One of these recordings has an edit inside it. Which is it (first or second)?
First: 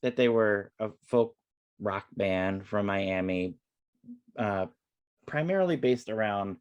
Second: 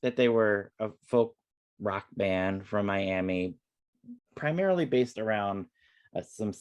second